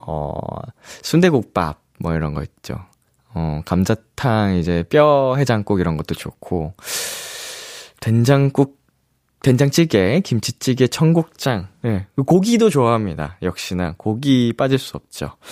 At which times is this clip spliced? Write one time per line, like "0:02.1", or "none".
none